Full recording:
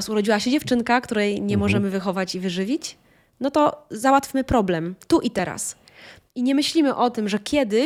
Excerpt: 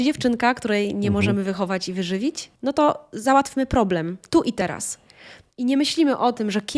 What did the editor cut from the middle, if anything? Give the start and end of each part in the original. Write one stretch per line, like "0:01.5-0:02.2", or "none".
0:03.0-0:03.3